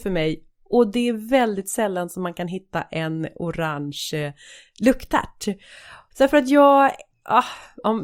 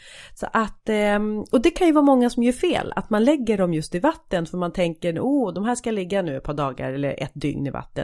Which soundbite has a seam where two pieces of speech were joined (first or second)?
first